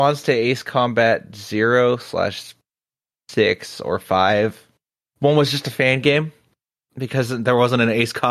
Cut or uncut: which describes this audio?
uncut